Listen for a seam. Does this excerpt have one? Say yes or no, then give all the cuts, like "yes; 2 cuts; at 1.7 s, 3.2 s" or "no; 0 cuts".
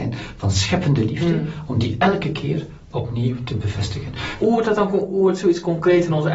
yes; 1 cut; at 4.4 s